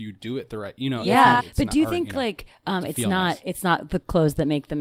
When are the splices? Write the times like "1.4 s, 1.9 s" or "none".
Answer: 1.4 s